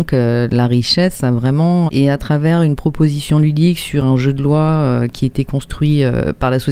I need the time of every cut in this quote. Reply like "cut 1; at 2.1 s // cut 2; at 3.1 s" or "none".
cut 1; at 1.9 s